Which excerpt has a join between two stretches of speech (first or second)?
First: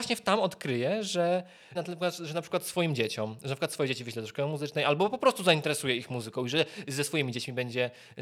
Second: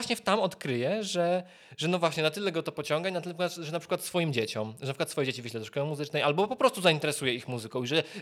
first